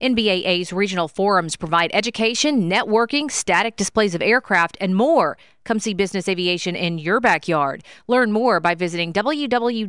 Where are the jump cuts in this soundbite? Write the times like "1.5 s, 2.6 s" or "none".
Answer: none